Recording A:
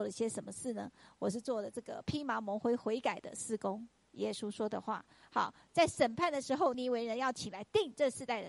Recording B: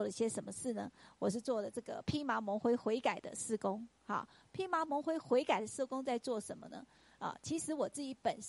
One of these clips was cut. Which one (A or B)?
A